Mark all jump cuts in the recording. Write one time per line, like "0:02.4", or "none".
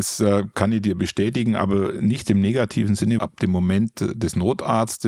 0:03.2